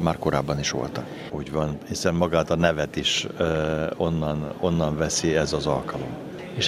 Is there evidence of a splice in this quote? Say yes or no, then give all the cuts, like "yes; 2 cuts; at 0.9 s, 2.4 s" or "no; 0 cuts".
yes; 1 cut; at 1.3 s